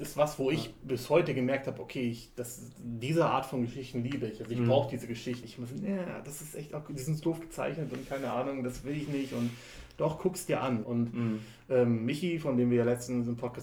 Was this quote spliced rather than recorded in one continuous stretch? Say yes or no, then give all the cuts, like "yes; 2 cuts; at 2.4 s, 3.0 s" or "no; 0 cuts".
yes; 2 cuts; at 5.4 s, 10.8 s